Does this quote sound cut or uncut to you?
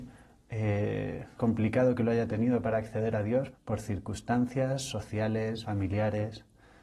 cut